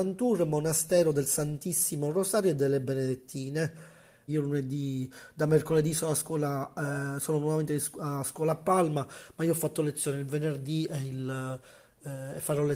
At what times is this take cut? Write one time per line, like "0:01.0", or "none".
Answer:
0:04.3